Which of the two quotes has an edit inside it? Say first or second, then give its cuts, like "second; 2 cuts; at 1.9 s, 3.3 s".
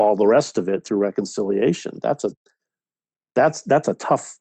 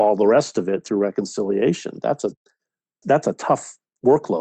second; 1 cut; at 3.0 s